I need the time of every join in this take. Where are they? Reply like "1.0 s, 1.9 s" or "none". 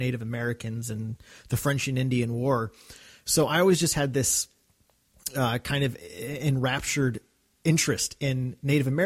none